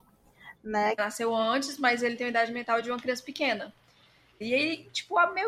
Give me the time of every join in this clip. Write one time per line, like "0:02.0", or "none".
0:01.0
0:04.4